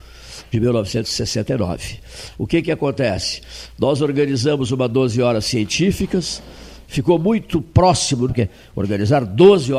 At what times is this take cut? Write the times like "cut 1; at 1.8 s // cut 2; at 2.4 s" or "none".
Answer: cut 1; at 2.3 s // cut 2; at 6.8 s // cut 3; at 8.3 s